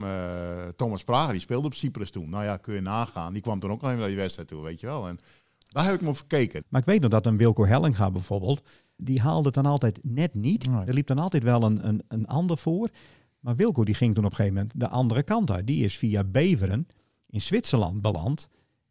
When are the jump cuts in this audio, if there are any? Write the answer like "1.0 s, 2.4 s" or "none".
6.6 s, 9.0 s